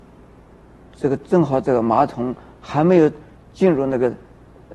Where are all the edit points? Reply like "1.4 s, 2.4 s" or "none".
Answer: none